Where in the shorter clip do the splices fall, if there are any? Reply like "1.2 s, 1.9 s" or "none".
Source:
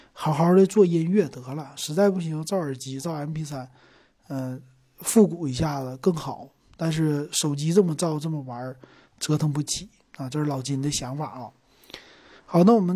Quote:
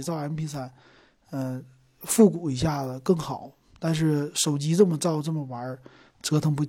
none

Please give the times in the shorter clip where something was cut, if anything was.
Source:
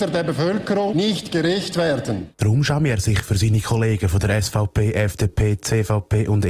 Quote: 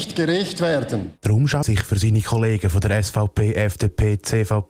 1.6 s

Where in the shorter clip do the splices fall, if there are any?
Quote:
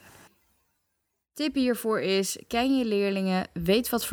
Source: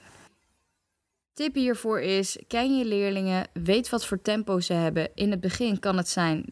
none

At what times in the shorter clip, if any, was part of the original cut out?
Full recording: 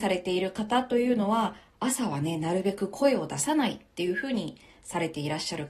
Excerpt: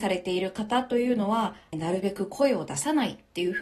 1.7 s

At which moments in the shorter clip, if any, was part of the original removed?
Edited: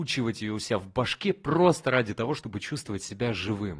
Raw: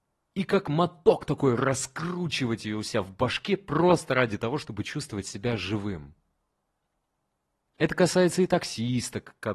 none

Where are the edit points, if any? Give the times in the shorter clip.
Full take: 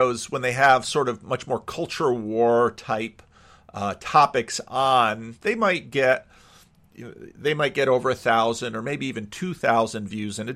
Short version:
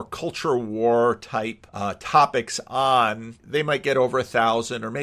1.7 s, 3.4 s

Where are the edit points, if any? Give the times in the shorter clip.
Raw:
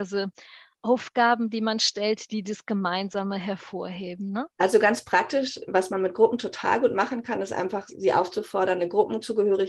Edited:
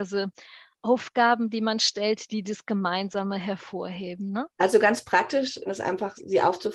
5.7 s

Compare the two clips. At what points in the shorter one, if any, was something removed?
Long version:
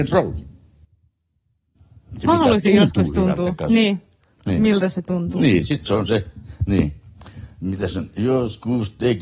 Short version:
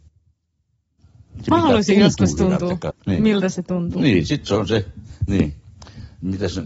2.9 s

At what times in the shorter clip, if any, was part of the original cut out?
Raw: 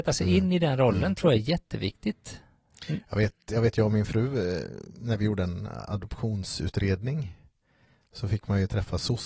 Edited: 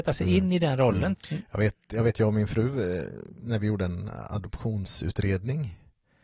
1.1 s

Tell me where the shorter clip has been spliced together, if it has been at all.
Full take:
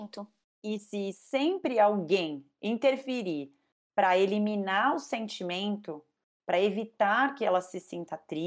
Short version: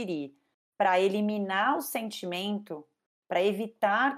none

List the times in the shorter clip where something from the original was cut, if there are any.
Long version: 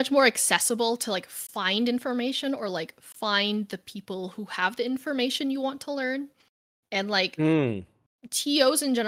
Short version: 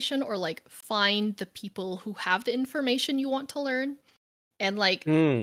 none

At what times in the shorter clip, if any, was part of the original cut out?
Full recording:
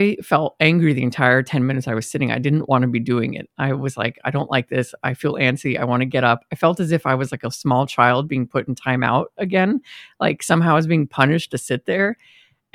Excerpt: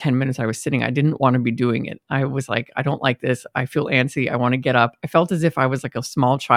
none

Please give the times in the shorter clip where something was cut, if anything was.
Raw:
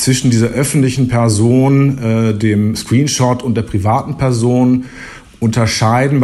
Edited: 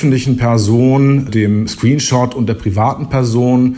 1.3 s

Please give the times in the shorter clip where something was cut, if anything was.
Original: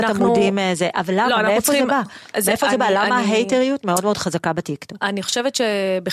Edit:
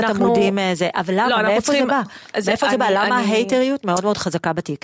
none

